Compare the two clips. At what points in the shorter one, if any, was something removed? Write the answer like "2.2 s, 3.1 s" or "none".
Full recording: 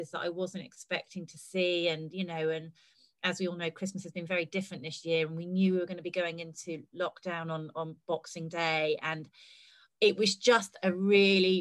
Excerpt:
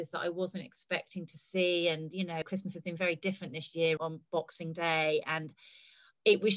2.4 s, 4.0 s